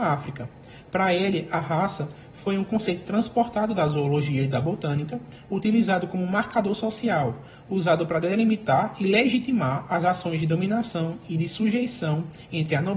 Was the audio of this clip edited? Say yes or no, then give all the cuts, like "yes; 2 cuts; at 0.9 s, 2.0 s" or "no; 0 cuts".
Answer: no; 0 cuts